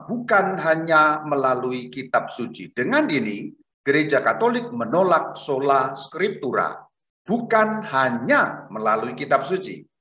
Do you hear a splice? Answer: no; 0 cuts

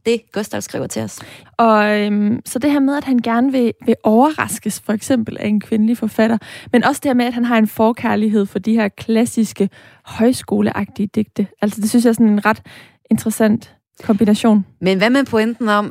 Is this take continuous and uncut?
no; 1 cut; at 1.4 s

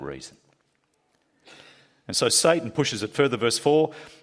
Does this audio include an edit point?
no; 0 cuts

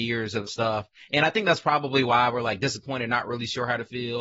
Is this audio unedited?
yes; 0 cuts

